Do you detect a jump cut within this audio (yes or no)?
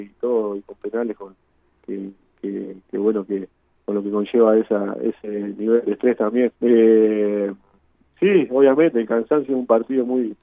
yes